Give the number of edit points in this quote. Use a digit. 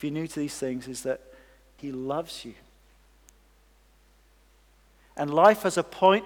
1